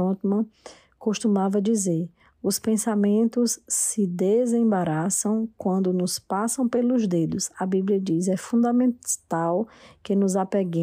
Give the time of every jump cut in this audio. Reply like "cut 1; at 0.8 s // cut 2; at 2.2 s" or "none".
cut 1; at 7.5 s